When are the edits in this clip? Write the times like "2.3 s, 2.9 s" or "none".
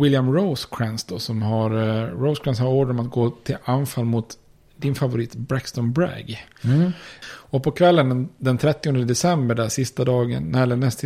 7.2 s